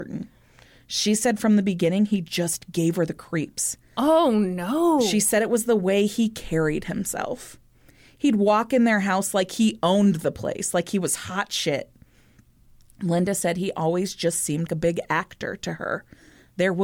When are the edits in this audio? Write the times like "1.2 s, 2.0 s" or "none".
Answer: 14.7 s